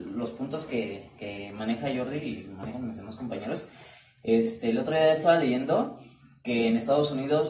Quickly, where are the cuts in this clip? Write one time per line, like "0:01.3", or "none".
none